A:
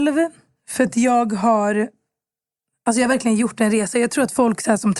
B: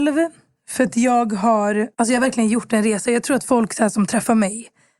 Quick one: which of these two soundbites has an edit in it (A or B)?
B